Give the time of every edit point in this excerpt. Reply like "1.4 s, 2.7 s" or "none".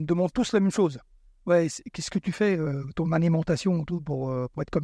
none